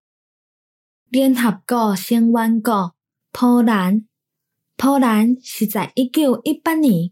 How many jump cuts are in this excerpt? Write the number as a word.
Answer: zero